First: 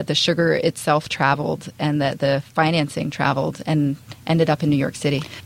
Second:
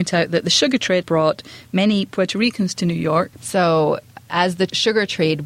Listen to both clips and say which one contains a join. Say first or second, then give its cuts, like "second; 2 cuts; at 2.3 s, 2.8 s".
second; 2 cuts; at 1.0 s, 3.4 s